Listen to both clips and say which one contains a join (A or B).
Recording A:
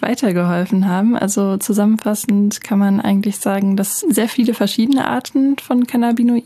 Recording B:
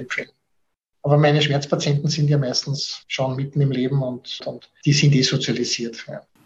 B